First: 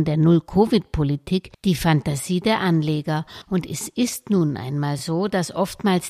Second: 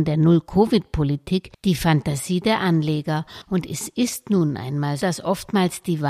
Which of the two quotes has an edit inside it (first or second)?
second